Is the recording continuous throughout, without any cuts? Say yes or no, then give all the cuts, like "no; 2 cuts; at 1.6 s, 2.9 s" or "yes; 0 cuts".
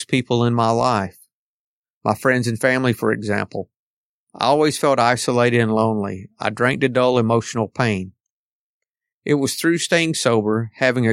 yes; 0 cuts